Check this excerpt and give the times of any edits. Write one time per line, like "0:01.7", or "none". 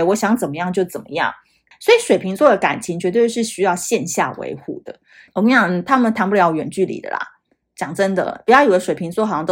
0:01.7
0:05.3